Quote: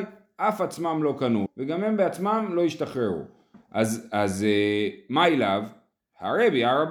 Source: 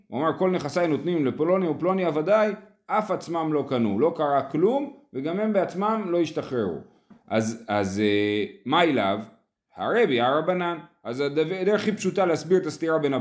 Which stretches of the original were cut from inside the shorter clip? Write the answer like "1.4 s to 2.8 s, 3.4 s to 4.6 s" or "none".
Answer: 4.0 s to 5.0 s